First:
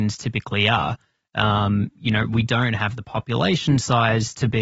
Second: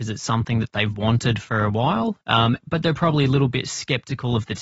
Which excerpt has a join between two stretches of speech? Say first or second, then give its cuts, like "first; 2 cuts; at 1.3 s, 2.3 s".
second; 1 cut; at 2.2 s